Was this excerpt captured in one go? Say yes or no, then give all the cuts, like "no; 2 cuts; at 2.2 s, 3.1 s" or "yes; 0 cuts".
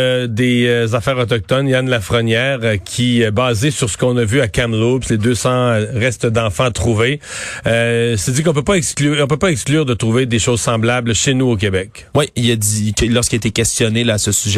yes; 0 cuts